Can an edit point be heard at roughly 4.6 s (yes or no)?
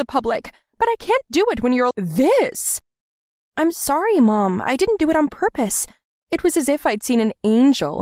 no